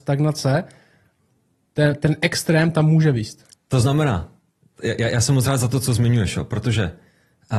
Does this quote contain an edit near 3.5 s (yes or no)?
yes